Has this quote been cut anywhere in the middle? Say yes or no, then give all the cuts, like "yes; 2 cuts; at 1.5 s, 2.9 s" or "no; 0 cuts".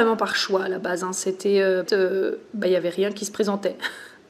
yes; 1 cut; at 1.8 s